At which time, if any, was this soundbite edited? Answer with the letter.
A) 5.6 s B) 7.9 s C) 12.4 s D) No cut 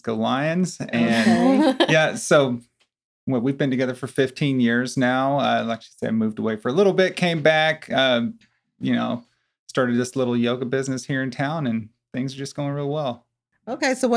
D